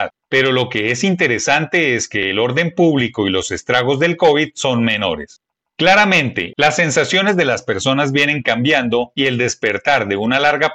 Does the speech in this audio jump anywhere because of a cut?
no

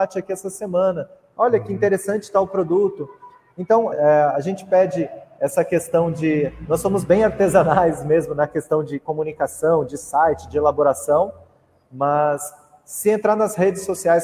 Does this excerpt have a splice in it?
yes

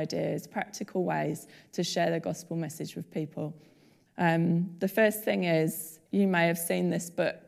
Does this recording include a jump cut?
yes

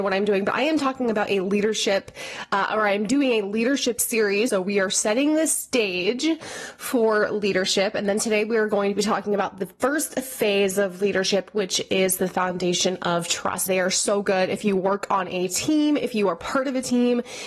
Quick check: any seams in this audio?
yes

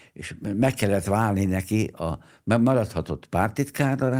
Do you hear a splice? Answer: no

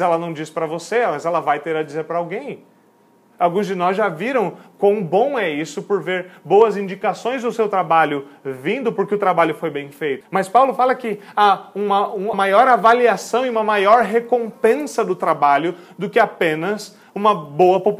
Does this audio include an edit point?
yes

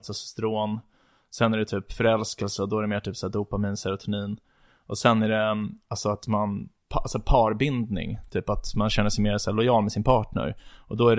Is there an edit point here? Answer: no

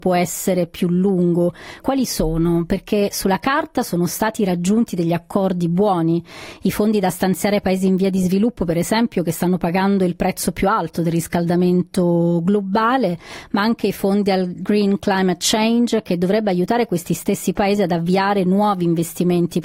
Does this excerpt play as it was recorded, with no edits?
no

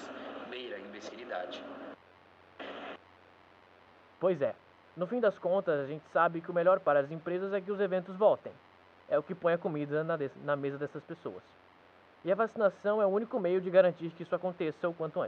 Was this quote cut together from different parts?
no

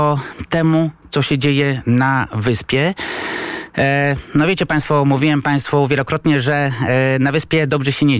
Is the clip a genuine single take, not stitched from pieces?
yes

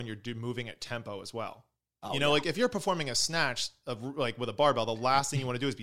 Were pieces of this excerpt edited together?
no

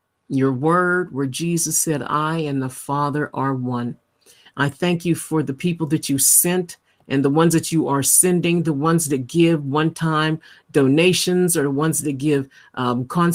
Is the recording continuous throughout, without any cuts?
no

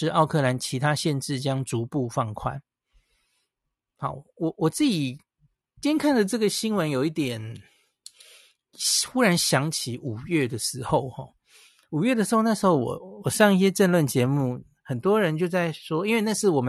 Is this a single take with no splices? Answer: yes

